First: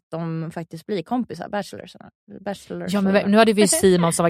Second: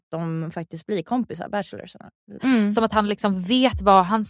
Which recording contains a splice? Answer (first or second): second